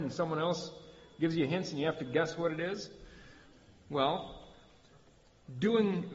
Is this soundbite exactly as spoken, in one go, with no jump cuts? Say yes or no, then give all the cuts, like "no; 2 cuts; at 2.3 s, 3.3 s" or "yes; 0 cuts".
yes; 0 cuts